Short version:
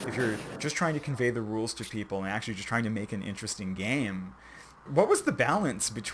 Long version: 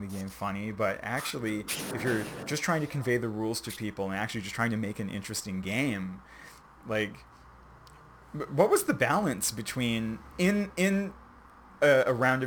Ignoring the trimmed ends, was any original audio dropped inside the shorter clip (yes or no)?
yes